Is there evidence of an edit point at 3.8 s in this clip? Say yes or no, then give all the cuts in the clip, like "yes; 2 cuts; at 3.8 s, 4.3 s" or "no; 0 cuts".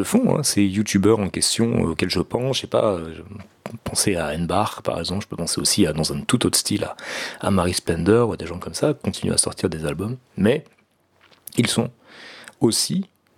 no; 0 cuts